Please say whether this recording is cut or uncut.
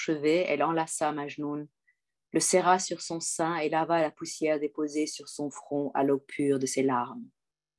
uncut